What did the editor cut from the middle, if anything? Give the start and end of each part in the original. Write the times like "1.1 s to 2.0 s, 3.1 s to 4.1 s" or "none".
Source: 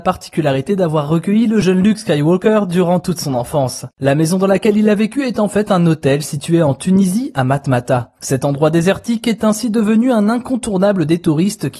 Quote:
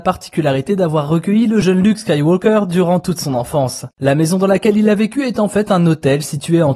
none